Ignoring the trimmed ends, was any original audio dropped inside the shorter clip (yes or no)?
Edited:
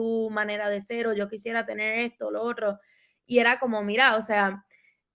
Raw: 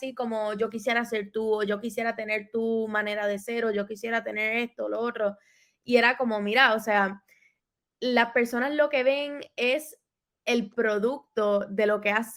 no